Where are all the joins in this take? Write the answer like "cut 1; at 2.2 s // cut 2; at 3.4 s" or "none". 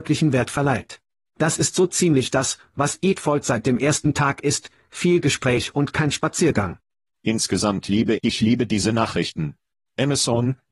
cut 1; at 7.1 s // cut 2; at 8.2 s